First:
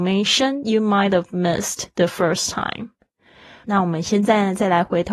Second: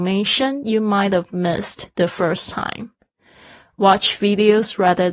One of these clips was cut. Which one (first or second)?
first